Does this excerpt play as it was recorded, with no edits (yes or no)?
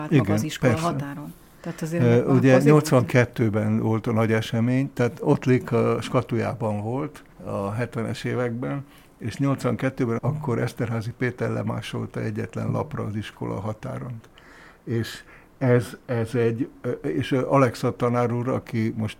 no